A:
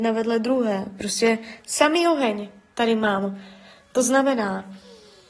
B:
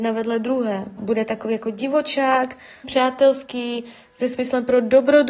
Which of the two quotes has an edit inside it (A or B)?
B